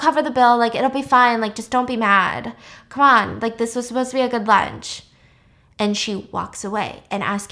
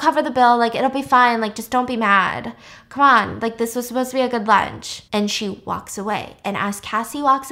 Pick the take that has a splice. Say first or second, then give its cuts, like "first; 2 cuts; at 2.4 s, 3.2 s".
second; 1 cut; at 5.1 s